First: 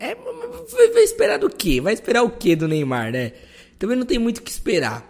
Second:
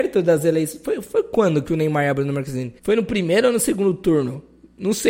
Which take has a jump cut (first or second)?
second